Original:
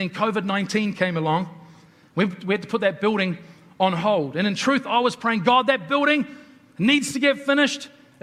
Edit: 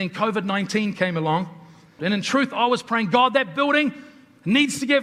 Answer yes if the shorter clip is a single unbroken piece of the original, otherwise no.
no